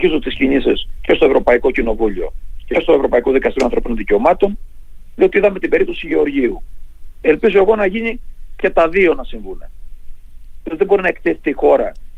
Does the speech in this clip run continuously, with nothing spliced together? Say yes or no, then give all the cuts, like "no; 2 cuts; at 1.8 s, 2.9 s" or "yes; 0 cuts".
no; 1 cut; at 7.2 s